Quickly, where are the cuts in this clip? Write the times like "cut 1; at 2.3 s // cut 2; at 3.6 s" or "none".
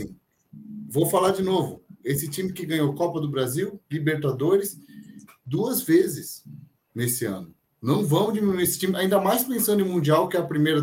none